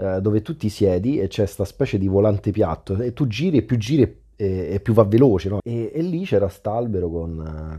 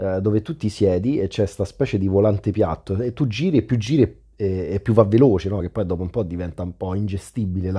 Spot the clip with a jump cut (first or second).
first